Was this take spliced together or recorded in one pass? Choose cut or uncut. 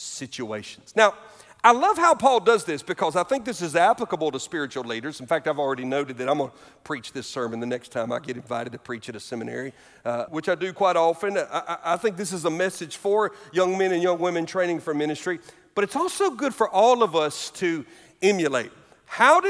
cut